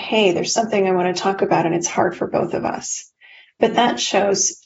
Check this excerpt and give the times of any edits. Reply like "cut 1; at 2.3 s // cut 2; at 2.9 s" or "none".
none